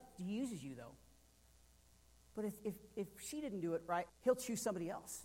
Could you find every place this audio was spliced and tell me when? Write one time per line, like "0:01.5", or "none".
0:04.1